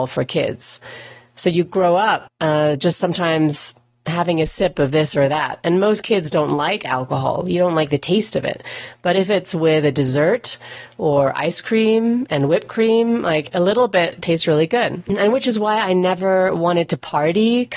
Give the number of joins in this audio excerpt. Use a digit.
0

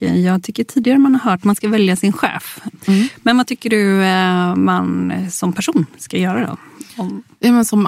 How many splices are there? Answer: 0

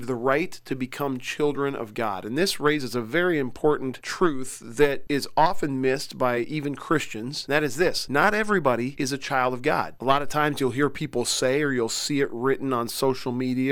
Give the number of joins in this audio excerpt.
0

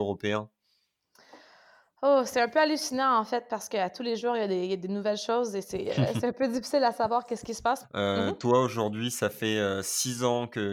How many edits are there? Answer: 1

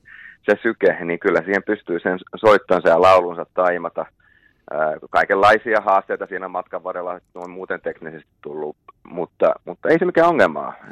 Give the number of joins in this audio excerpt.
0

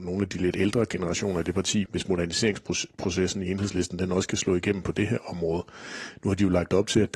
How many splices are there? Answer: 1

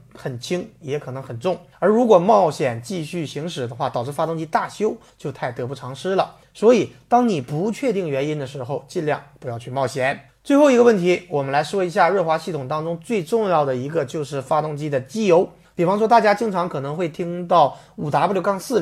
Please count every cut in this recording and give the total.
1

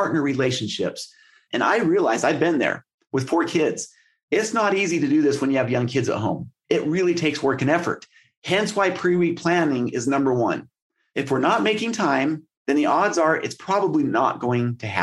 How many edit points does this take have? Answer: 2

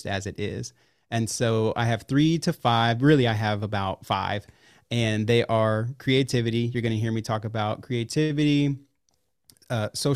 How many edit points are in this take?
0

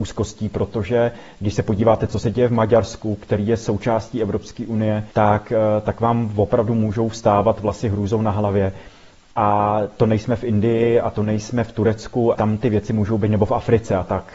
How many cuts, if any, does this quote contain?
2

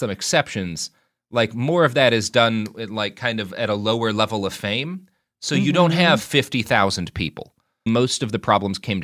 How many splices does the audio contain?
1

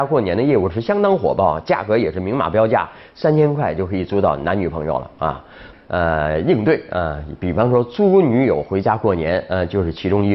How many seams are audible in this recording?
1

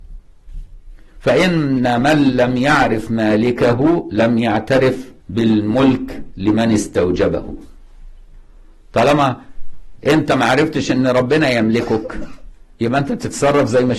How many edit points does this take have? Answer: 1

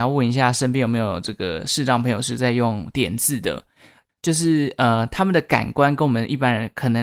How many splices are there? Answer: 1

